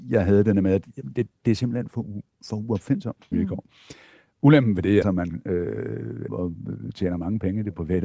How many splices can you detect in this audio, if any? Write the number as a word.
three